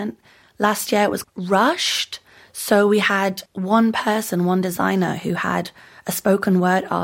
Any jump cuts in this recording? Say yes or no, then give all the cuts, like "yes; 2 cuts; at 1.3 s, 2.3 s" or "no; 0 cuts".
yes; 2 cuts; at 1.2 s, 3.5 s